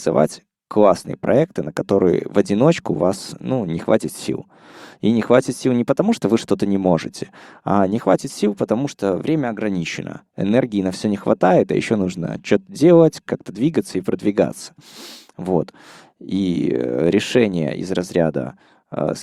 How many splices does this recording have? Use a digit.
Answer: 1